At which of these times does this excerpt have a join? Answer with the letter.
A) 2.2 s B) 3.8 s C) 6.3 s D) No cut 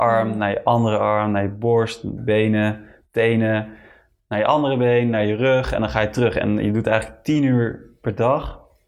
A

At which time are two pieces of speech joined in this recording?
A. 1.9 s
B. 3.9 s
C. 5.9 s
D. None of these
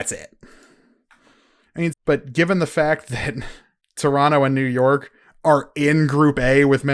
A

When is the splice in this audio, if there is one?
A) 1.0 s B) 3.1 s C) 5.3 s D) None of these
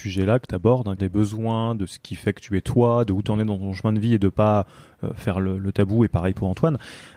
A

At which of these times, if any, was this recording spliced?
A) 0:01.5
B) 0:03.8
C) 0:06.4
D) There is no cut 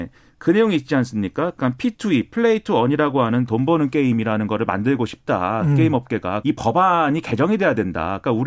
C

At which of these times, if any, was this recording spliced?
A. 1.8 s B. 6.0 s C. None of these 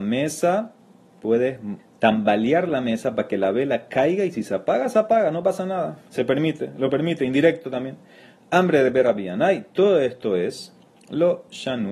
A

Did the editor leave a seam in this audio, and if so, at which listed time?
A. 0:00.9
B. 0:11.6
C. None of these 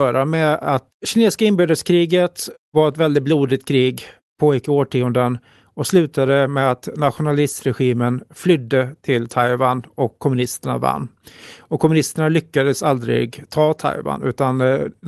A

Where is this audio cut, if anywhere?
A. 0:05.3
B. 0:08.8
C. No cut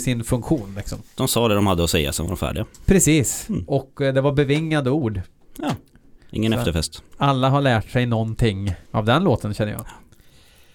B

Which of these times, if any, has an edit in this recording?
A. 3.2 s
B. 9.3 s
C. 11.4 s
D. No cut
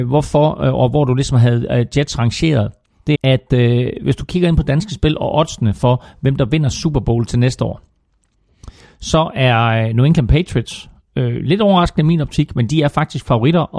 A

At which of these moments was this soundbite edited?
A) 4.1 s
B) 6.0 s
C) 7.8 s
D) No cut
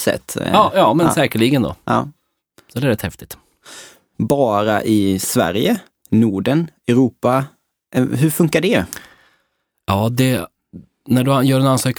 A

